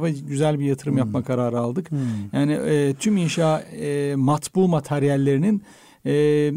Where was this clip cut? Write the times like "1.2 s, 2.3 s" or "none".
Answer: none